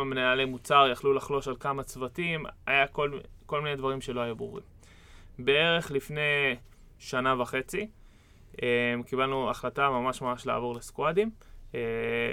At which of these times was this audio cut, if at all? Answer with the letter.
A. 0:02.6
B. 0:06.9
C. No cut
C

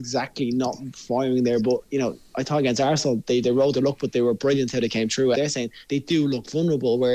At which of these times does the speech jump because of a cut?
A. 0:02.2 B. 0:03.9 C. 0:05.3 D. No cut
C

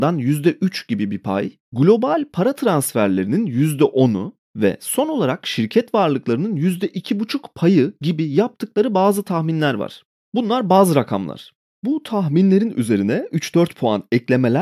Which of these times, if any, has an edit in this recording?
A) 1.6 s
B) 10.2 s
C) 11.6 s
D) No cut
A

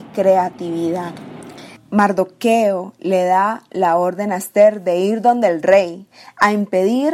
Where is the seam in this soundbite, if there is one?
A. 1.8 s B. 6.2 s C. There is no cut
A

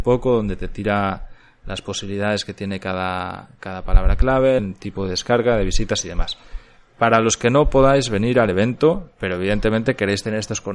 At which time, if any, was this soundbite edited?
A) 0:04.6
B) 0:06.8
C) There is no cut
A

